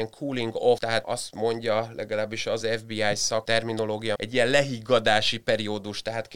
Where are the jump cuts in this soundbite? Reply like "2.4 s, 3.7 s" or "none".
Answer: 2.6 s, 4.2 s